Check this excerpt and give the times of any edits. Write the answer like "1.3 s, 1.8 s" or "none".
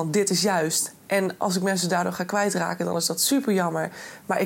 none